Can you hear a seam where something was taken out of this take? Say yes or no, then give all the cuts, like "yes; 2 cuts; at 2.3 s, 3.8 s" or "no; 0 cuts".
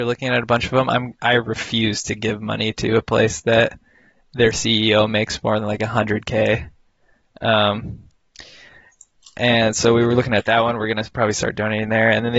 no; 0 cuts